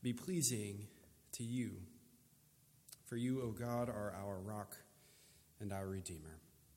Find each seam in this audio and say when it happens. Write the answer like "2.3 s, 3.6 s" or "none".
none